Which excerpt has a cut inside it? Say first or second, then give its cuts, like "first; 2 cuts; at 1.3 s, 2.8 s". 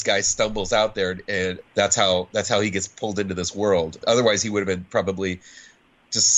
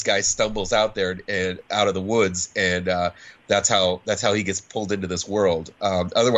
first; 2 cuts; at 1.7 s, 4.0 s